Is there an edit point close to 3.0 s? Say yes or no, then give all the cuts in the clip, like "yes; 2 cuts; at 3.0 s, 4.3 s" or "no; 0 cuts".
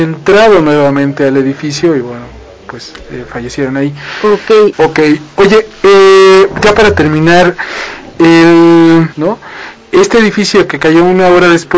no; 2 cuts; at 4.7 s, 9.1 s